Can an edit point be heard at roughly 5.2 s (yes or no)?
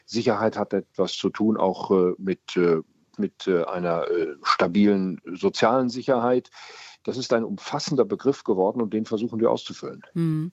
no